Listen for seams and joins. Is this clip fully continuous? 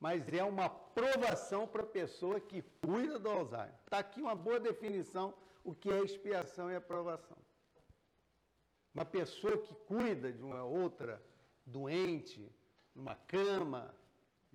yes; 0 cuts

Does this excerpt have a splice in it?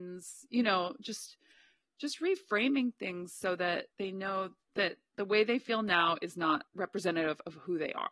no; 0 cuts

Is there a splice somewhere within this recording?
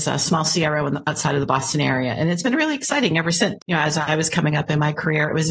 yes; 1 cut; at 3.6 s

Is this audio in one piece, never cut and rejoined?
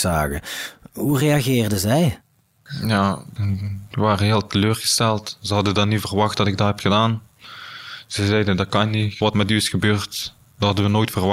no; 1 cut; at 9.3 s

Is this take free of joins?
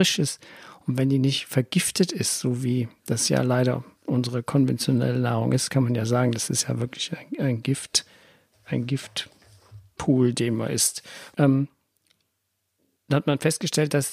no; 1 cut; at 11.3 s

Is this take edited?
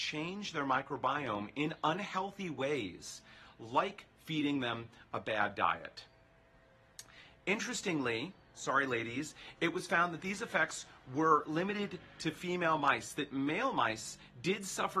no; 0 cuts

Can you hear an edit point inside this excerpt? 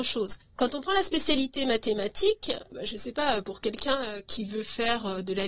no; 0 cuts

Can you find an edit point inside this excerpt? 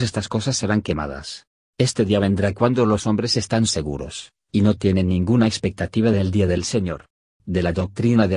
yes; 2 cuts; at 1.7 s, 7.4 s

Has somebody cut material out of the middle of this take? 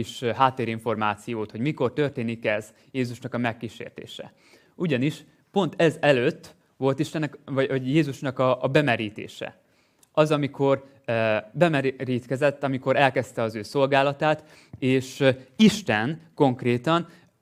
no; 0 cuts

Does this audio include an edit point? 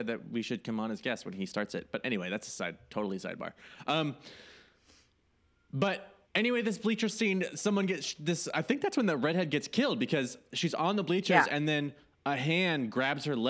yes; 1 cut; at 6.2 s

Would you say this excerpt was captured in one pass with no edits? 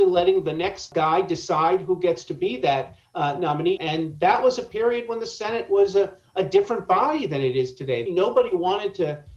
no; 2 cuts; at 3.8 s, 8.1 s

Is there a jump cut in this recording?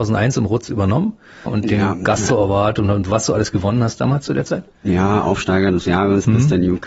yes; 1 cut; at 1.5 s

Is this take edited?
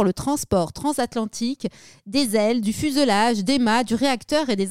no; 0 cuts

